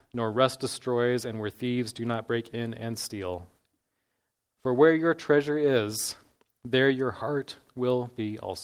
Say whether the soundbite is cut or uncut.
uncut